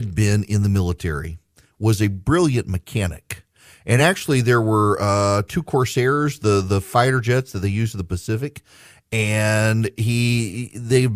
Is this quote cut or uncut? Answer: uncut